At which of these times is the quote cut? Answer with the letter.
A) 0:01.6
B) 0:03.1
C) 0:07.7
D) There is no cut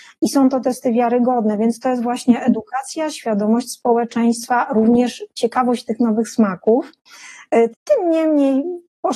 C